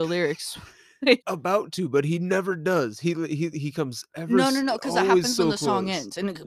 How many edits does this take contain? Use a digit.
1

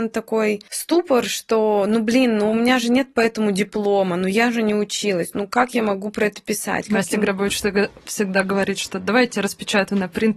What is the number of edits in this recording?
0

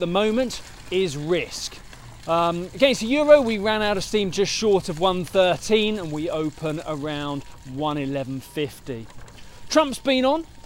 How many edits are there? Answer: 1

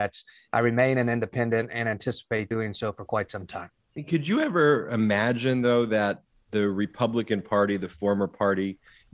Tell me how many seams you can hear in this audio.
0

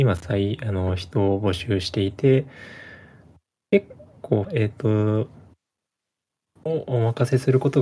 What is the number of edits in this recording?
1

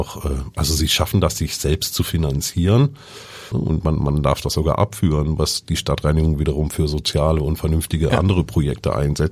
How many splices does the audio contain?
1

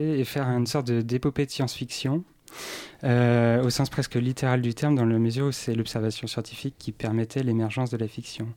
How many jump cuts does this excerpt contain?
0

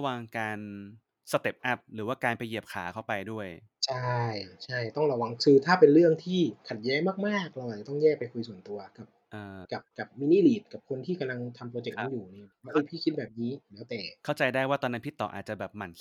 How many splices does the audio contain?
2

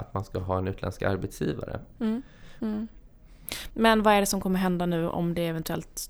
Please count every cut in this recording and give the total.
2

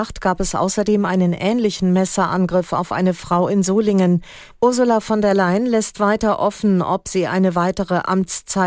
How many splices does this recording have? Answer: 1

